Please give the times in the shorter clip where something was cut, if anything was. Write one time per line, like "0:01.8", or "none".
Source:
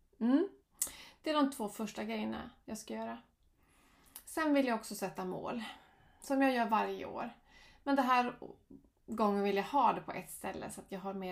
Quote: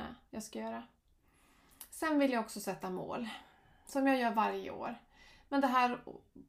none